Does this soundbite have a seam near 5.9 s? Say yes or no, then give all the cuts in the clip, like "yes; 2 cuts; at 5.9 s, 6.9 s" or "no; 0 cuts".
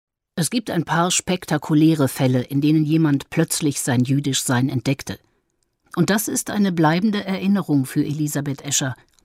yes; 1 cut; at 5.9 s